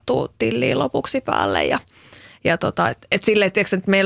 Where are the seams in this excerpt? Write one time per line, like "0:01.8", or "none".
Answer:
none